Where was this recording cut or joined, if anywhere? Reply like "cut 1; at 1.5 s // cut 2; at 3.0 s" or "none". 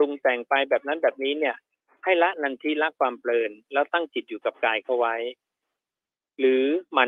none

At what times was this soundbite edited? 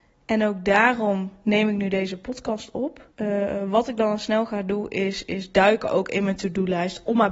cut 1; at 3.1 s

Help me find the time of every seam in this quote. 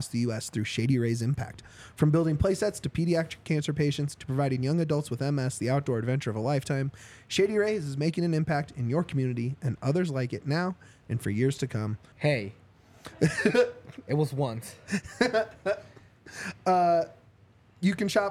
cut 1; at 12.1 s

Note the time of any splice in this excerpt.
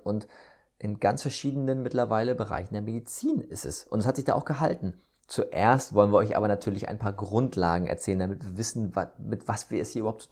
cut 1; at 5.2 s

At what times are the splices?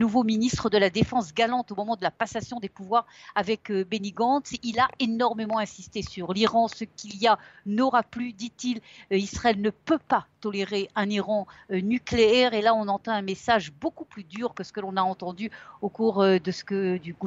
none

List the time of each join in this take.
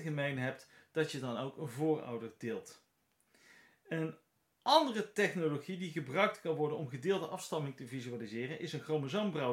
none

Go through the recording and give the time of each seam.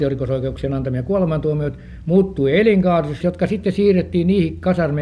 cut 1; at 3.2 s

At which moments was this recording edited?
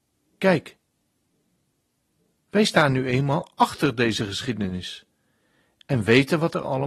none

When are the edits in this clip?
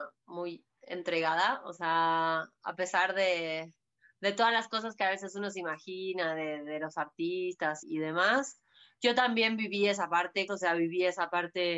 cut 1; at 7.8 s // cut 2; at 10.5 s

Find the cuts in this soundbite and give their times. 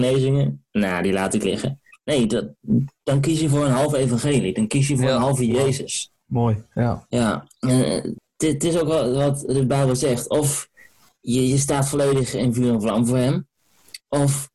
none

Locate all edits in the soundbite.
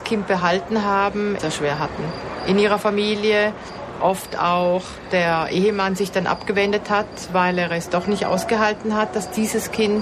cut 1; at 1.4 s

